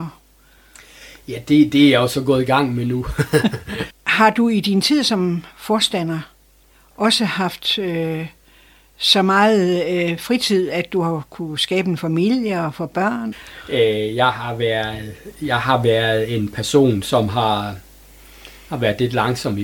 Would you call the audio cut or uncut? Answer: cut